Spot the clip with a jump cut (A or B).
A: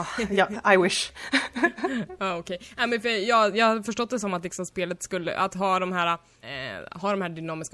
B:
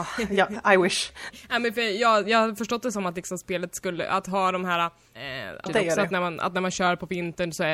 B